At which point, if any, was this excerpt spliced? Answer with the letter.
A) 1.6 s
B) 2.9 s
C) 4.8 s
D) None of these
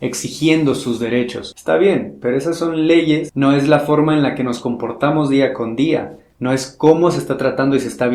A